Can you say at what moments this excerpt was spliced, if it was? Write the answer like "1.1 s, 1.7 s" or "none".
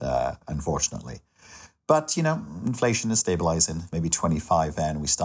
3.9 s